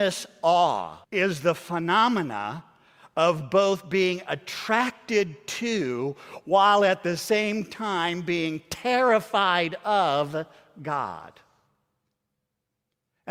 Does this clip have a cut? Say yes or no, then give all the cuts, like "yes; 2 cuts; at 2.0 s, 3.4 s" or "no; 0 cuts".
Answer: yes; 1 cut; at 1.0 s